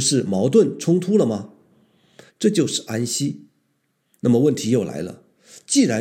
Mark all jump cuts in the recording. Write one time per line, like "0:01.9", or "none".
0:02.3
0:03.9